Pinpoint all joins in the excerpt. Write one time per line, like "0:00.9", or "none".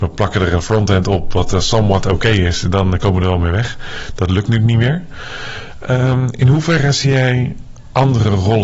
none